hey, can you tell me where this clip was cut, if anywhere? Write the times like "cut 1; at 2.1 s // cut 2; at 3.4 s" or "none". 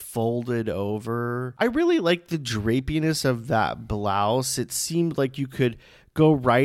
none